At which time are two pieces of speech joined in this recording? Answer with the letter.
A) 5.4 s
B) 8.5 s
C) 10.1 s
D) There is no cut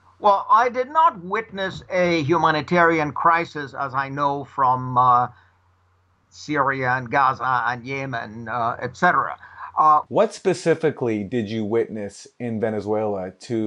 C